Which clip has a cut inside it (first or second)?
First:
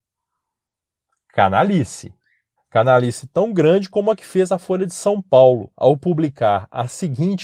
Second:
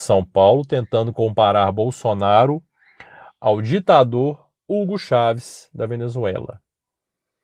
first